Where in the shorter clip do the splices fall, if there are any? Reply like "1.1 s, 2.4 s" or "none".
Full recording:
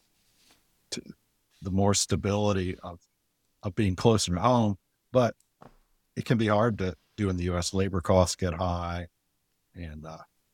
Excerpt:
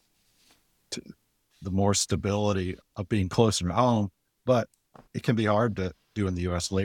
2.8 s, 5.1 s